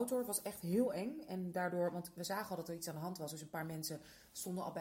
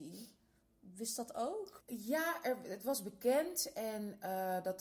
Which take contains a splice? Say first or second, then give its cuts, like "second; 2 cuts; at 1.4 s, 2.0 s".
second; 1 cut; at 1.8 s